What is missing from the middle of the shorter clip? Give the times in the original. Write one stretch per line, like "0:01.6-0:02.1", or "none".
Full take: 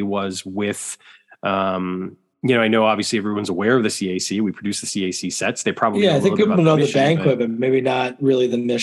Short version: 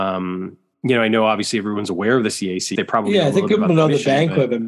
0:04.3-0:05.6